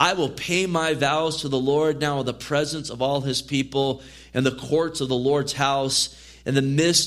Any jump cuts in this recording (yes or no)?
no